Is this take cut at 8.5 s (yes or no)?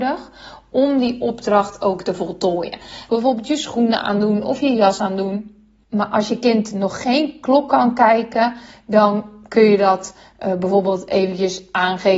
no